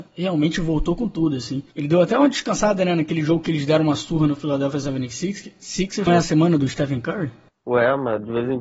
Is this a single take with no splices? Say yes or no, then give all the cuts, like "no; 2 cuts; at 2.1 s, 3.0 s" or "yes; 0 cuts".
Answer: no; 1 cut; at 6.1 s